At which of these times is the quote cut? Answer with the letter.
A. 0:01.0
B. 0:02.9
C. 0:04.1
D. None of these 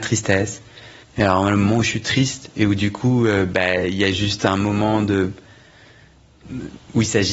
A